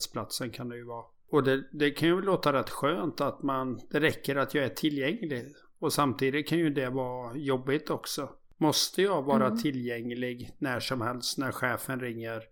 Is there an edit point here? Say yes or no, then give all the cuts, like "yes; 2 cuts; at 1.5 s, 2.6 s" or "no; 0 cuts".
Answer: no; 0 cuts